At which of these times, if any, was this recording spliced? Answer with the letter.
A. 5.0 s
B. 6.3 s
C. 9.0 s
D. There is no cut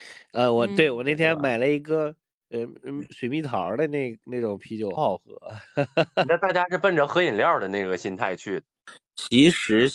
A